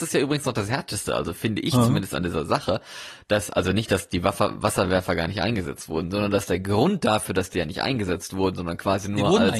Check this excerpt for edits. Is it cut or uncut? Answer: uncut